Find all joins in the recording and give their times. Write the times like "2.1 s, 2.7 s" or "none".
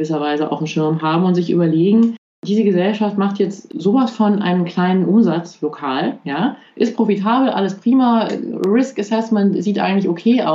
none

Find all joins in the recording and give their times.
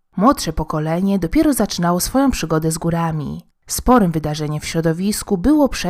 3.6 s

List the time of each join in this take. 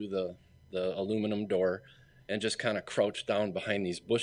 none

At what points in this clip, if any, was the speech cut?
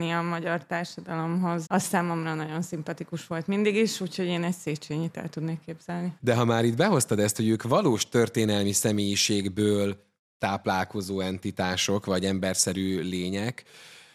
1.7 s, 6.2 s

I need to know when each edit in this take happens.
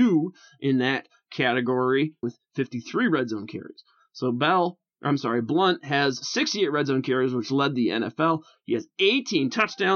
2.2 s

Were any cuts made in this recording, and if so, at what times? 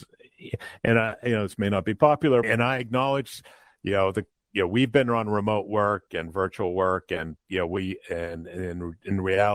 2.4 s

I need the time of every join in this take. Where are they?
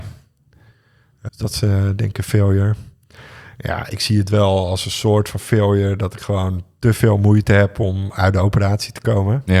1.3 s

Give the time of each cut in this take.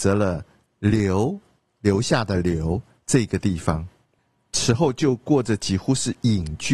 none

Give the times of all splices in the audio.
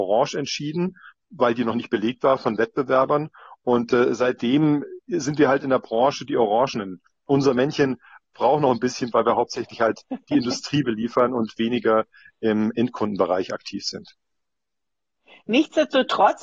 7.1 s, 9.1 s

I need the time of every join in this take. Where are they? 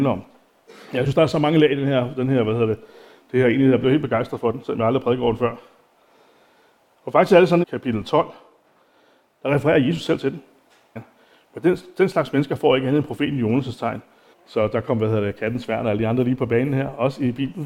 7.6 s, 11.0 s, 14.3 s

